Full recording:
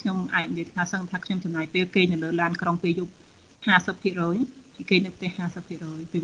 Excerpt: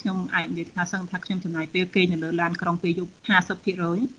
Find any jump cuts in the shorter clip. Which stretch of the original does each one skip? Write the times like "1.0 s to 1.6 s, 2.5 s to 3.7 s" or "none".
3.2 s to 3.6 s